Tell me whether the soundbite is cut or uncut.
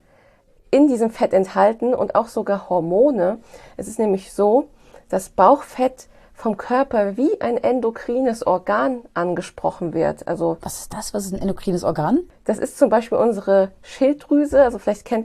uncut